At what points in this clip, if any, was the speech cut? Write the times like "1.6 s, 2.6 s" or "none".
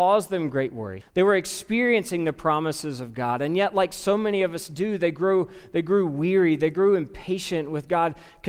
1.0 s

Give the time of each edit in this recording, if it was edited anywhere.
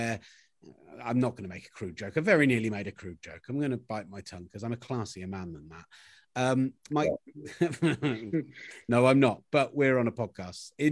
6.9 s

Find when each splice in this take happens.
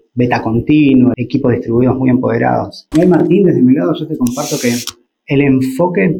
1.1 s, 2.9 s

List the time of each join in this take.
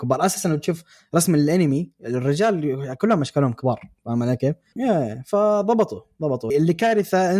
4.8 s, 6.5 s

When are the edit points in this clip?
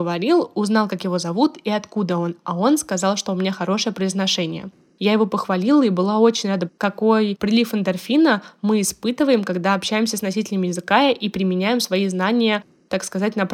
6.7 s

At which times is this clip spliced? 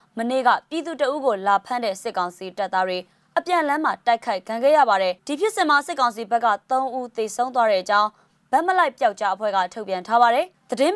5.2 s

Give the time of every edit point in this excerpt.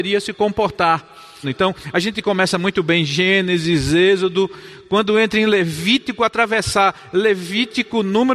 1.4 s

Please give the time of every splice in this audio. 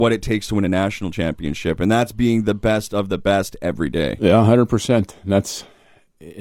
none

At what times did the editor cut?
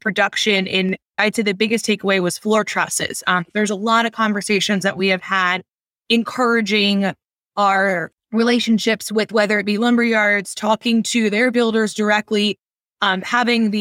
none

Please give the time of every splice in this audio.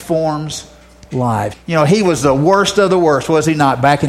1.5 s

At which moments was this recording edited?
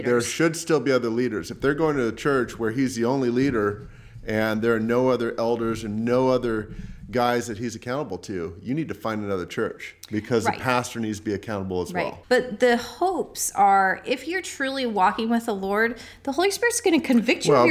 12.2 s

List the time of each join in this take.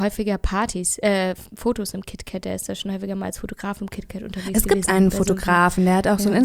none

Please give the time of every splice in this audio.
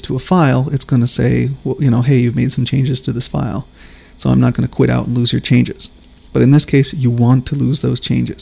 4.5 s

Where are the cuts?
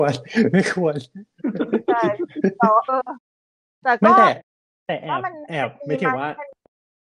2.9 s

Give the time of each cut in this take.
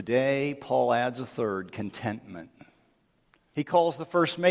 3.5 s

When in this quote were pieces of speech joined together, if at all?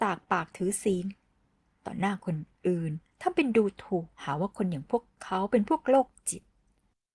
4.1 s

